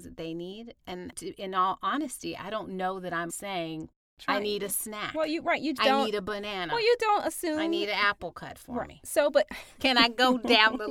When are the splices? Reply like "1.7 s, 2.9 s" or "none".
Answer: 3.3 s, 5.8 s